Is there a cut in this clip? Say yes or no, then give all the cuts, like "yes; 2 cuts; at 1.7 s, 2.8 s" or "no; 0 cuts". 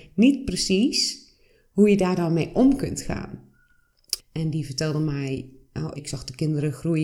yes; 2 cuts; at 4.2 s, 6.0 s